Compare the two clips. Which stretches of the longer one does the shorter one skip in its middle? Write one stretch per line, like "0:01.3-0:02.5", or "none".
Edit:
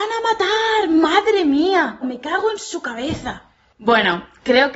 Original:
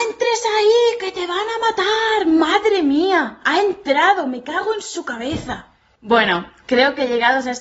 0:03.4-0:04.2